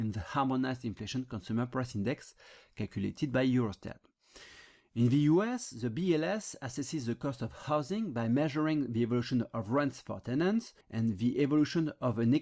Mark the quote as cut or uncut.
cut